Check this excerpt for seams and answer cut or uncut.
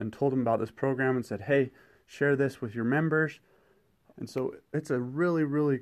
cut